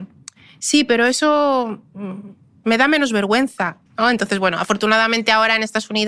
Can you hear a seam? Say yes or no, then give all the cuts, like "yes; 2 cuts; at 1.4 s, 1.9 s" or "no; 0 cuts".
yes; 1 cut; at 3.9 s